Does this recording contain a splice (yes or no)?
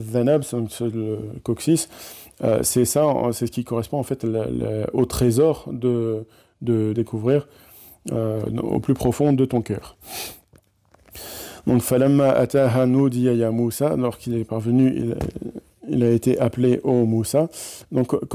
yes